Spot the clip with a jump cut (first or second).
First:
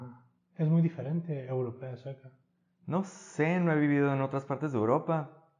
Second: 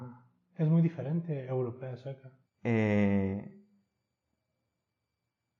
second